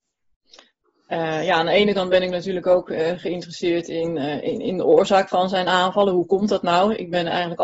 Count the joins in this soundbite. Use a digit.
0